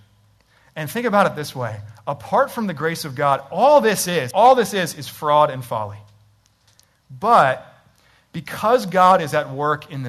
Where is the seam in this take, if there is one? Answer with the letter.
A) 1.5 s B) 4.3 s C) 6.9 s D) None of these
B